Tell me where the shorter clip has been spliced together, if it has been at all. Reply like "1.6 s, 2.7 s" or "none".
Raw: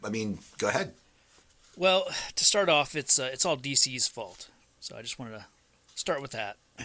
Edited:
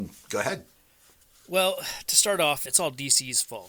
2.7 s